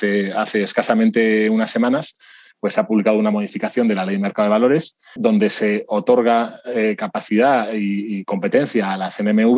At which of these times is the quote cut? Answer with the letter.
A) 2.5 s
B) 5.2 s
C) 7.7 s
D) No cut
B